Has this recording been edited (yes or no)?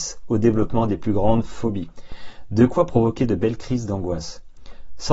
no